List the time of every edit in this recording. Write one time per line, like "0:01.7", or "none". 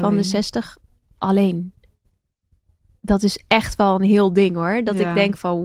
none